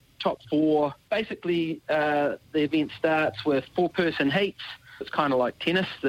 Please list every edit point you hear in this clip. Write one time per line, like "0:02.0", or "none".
0:01.1
0:05.0